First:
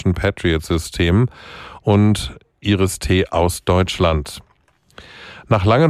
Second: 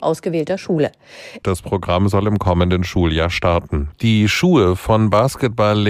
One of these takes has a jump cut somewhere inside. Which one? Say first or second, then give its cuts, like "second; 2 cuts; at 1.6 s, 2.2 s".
second; 2 cuts; at 1.4 s, 3.9 s